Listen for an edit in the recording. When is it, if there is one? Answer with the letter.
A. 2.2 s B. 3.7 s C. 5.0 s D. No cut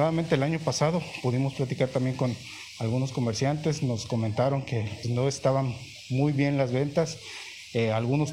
C